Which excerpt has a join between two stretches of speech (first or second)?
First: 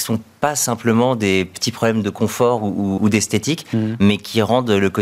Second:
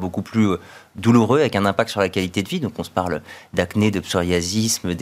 first